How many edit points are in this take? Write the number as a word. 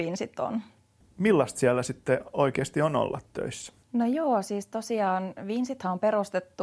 two